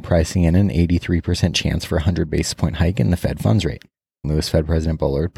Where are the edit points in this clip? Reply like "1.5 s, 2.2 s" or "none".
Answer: 4.2 s